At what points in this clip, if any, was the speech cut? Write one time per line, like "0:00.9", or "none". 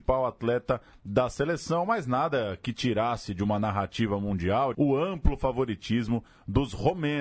0:04.7